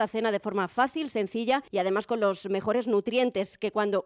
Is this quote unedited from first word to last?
no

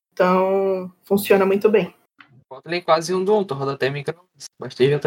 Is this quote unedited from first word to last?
yes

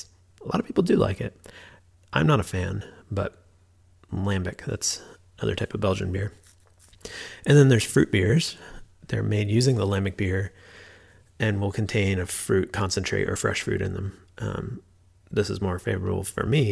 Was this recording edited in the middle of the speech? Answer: no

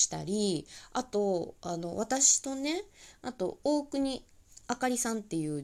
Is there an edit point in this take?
no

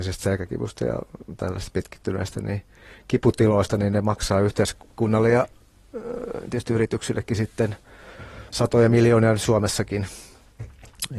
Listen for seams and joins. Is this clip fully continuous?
no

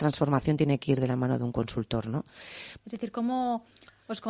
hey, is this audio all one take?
no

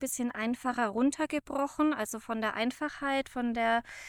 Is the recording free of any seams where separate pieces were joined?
yes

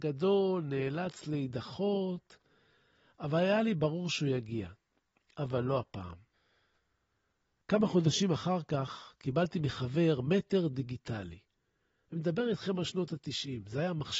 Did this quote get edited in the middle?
no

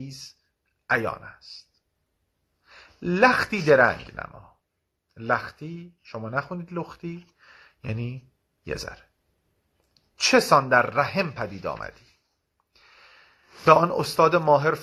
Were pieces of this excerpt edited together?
no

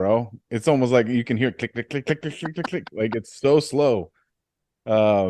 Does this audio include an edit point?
yes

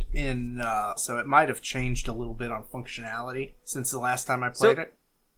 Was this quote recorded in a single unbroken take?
no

